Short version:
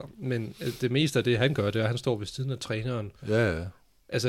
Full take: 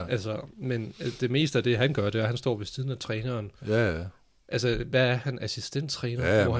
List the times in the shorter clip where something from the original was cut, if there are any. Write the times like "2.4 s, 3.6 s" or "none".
none